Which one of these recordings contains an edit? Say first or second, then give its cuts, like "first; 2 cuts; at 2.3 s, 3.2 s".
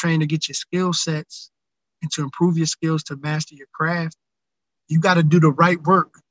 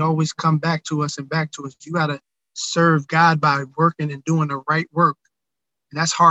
first; 1 cut; at 4.8 s